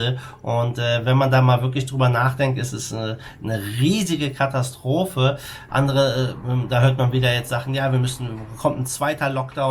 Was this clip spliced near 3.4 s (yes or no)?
no